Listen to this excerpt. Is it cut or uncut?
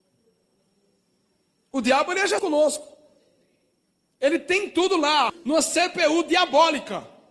cut